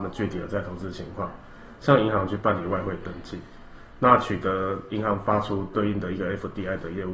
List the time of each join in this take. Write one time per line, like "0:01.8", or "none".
none